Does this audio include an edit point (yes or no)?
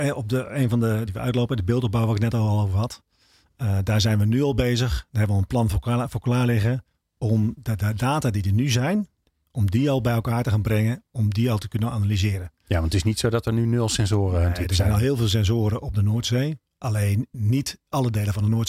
yes